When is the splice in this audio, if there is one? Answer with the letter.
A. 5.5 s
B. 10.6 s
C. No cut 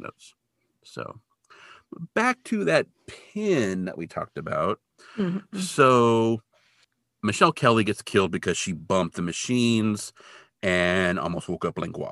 C